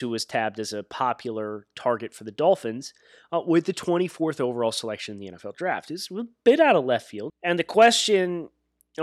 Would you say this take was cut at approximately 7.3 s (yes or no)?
yes